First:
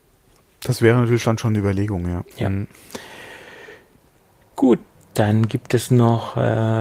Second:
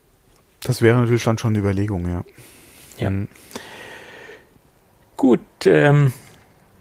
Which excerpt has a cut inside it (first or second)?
first